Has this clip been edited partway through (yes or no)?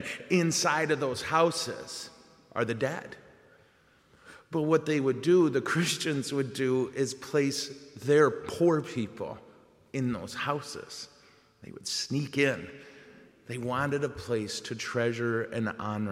no